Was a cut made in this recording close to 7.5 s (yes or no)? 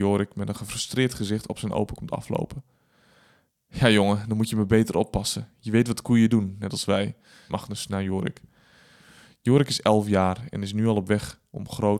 yes